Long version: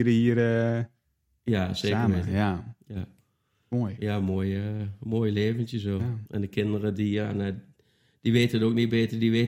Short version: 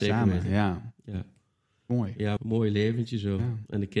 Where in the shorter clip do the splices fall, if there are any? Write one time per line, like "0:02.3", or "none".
0:02.4